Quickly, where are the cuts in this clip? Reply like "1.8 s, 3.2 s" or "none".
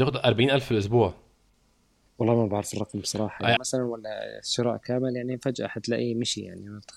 3.6 s